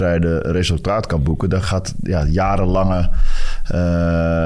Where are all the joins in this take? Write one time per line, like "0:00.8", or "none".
none